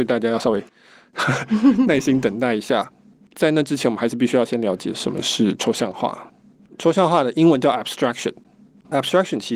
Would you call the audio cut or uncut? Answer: uncut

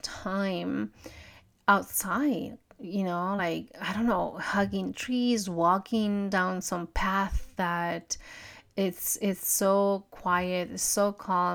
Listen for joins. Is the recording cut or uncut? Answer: uncut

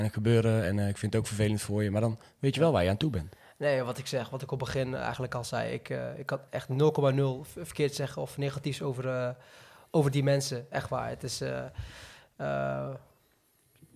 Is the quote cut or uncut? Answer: cut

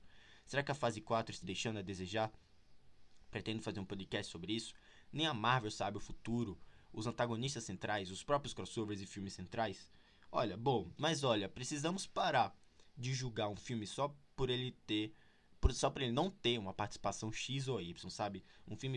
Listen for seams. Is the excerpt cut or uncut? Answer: cut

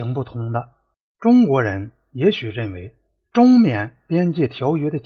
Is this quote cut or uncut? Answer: uncut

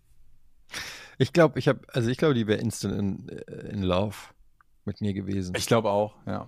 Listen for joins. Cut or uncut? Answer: uncut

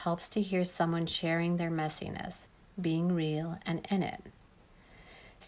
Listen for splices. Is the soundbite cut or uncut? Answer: uncut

